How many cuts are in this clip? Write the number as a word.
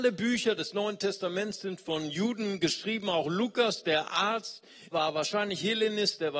one